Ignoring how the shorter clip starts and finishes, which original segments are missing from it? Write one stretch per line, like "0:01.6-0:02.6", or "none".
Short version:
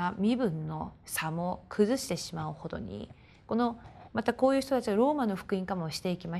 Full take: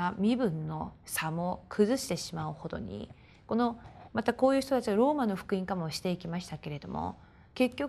none